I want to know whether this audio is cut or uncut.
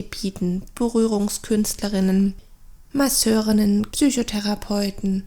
cut